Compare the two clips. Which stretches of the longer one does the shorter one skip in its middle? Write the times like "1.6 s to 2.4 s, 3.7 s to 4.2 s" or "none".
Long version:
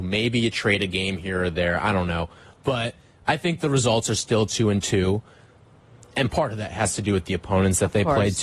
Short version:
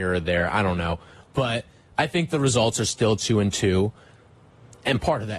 none